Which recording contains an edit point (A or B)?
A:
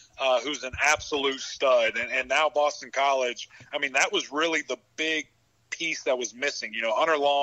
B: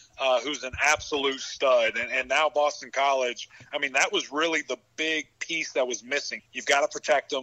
B